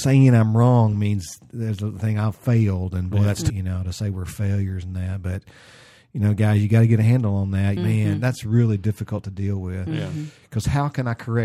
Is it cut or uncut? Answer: cut